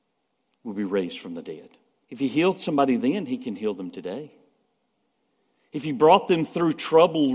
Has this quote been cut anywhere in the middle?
yes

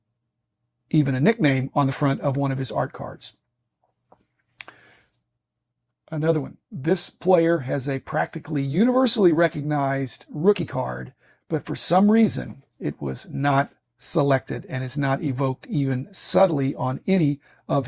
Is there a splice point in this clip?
no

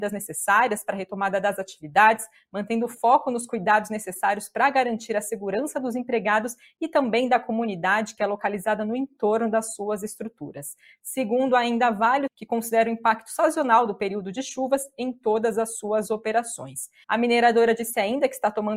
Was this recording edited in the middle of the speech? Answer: yes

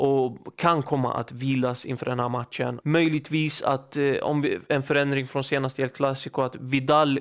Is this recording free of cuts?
no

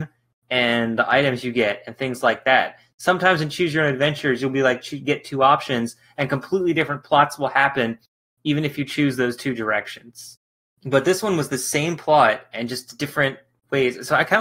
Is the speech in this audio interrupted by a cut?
no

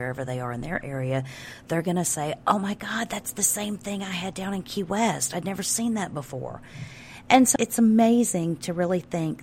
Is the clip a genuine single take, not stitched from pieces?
no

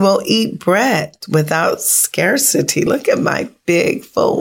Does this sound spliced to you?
no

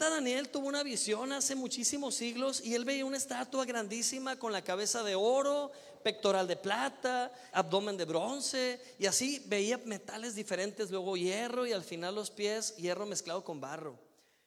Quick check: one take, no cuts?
no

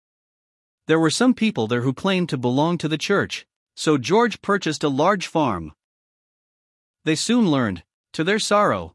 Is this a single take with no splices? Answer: yes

